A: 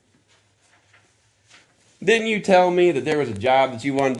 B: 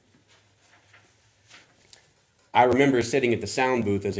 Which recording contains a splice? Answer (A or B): A